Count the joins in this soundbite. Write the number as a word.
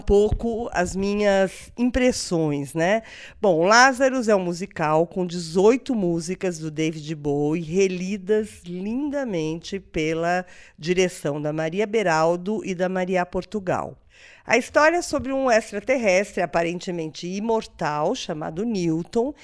zero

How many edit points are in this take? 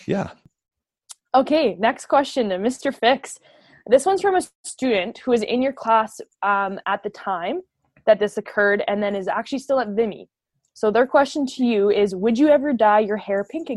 zero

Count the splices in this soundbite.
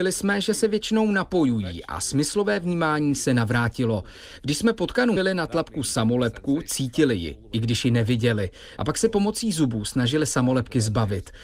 two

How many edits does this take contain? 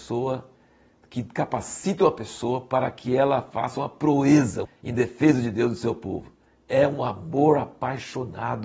one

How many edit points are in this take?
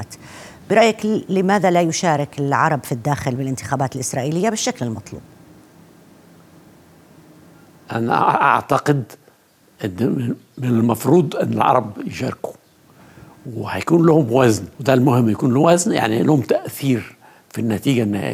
one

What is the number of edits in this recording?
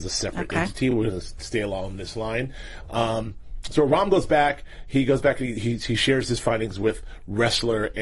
zero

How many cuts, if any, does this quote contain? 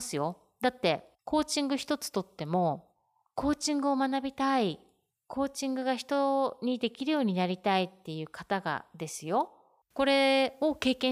two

